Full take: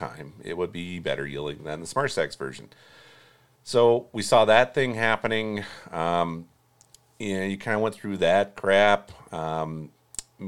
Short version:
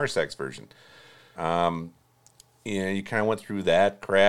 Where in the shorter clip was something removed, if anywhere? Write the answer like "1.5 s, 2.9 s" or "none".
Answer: 1.3 s